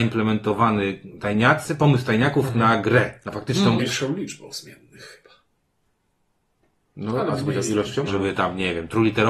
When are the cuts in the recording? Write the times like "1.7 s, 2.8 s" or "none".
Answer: 3.8 s, 8.1 s